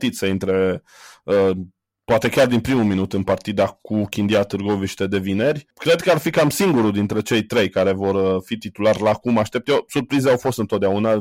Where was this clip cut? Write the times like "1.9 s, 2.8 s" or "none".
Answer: none